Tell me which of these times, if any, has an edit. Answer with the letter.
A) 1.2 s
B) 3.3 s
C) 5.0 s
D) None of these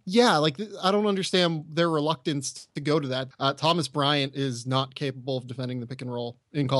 B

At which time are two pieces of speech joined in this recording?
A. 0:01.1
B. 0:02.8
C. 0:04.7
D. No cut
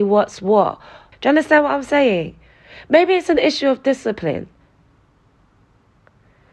A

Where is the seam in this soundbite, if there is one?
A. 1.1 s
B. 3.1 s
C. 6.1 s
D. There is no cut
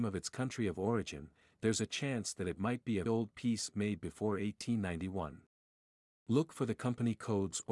B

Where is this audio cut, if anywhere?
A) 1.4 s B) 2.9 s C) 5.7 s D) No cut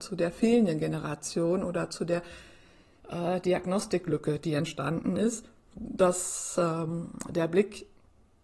C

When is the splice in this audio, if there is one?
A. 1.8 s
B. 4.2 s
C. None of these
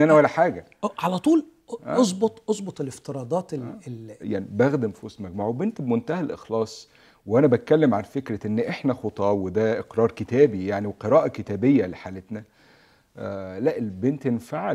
B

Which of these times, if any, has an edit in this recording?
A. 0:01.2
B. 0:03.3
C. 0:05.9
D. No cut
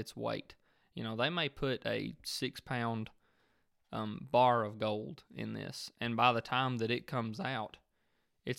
D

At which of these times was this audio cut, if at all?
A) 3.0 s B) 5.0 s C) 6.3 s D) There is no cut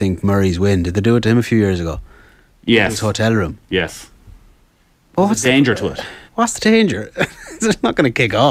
C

